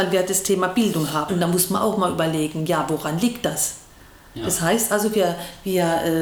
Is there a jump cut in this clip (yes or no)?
yes